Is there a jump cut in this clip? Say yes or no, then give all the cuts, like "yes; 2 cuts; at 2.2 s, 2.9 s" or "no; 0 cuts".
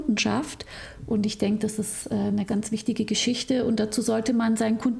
yes; 1 cut; at 2.5 s